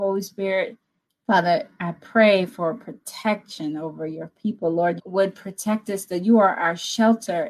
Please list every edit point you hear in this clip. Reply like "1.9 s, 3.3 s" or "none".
1.1 s, 5.0 s